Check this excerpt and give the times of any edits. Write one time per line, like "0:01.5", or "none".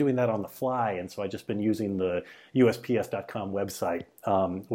none